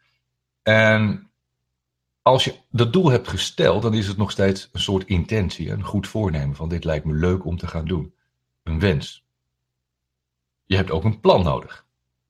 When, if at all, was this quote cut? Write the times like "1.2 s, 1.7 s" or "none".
none